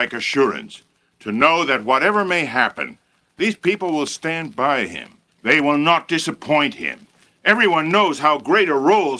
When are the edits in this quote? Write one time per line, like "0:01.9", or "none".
0:05.3